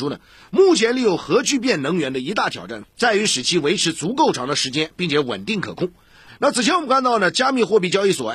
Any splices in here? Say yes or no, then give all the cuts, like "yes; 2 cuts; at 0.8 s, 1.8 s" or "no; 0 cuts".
yes; 1 cut; at 6.3 s